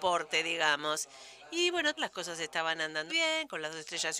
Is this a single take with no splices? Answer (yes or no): no